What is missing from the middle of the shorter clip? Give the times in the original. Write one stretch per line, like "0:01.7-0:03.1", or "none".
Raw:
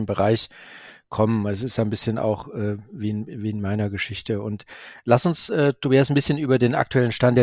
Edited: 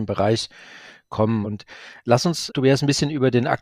0:01.4-0:04.4
0:05.5-0:05.8